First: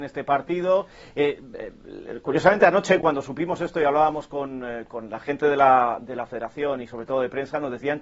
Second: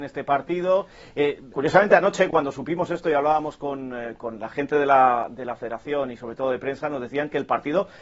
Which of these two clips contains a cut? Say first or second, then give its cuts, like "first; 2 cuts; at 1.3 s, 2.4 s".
second; 1 cut; at 1.5 s